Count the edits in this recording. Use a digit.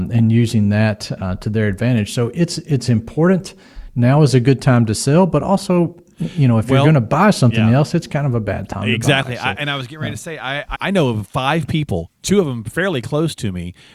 1